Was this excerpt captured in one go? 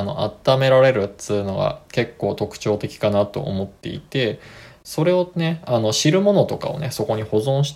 yes; 0 cuts

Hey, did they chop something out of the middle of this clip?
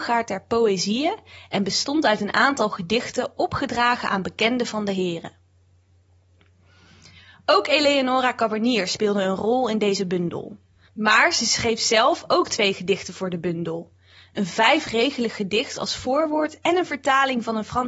yes; 1 cut; at 10.9 s

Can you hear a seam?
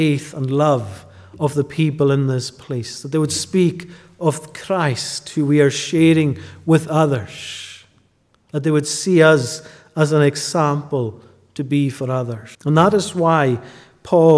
yes; 1 cut; at 12.5 s

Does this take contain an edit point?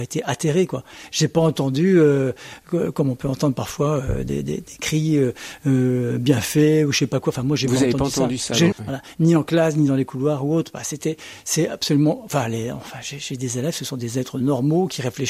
yes; 1 cut; at 8.7 s

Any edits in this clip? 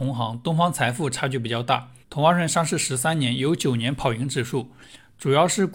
yes; 1 cut; at 2.0 s

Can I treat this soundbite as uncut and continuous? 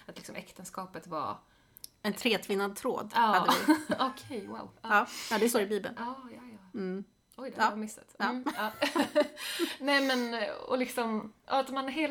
yes; 0 cuts

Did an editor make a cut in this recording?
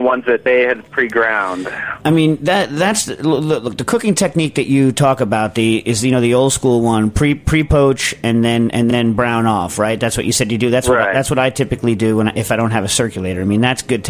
no; 0 cuts

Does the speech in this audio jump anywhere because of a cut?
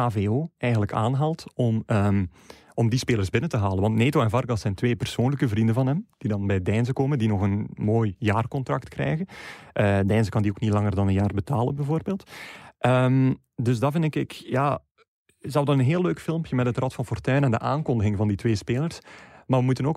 no; 0 cuts

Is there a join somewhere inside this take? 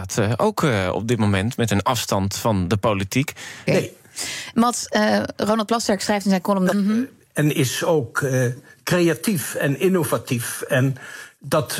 yes; 2 cuts; at 3.7 s, 6.7 s

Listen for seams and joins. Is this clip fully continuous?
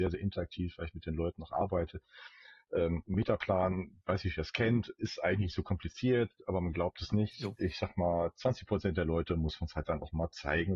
yes; 0 cuts

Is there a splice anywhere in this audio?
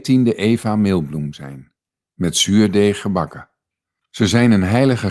yes; 1 cut; at 4.0 s

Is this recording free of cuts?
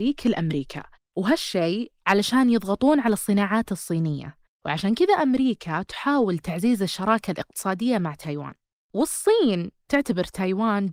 yes; 0 cuts

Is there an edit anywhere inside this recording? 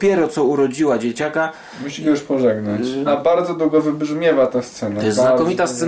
yes; 1 cut; at 3.1 s

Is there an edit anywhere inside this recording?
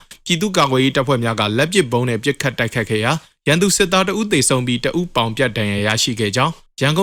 no; 0 cuts

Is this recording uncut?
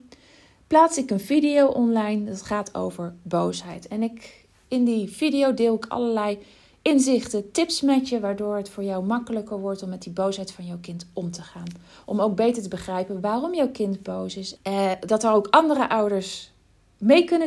no; 1 cut; at 14.6 s

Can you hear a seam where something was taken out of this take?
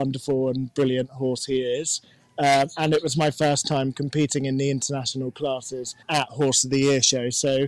yes; 1 cut; at 6.0 s

